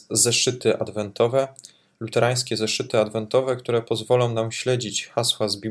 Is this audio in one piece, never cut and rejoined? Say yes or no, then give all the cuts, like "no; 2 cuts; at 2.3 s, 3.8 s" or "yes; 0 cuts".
yes; 0 cuts